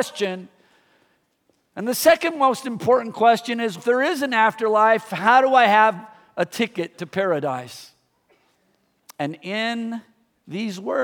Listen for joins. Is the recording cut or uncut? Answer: cut